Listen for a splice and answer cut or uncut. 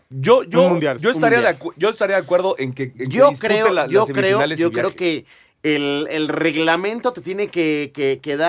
uncut